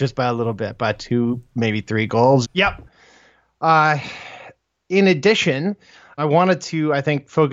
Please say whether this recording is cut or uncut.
cut